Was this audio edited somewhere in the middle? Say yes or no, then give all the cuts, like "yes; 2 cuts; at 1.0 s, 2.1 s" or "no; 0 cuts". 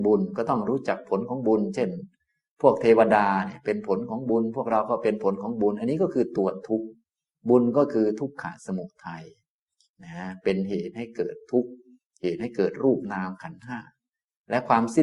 no; 0 cuts